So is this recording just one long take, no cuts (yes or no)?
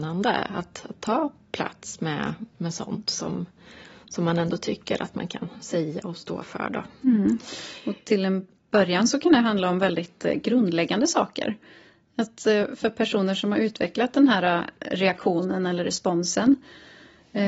yes